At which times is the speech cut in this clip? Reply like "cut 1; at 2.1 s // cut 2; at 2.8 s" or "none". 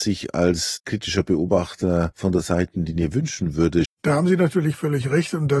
cut 1; at 3.9 s